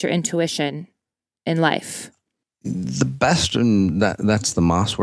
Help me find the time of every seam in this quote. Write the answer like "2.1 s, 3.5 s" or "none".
none